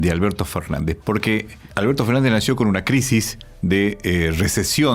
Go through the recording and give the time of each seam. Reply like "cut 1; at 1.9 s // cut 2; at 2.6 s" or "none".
cut 1; at 1.0 s